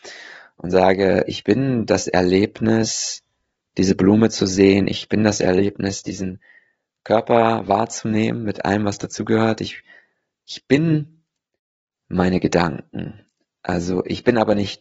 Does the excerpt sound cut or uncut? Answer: uncut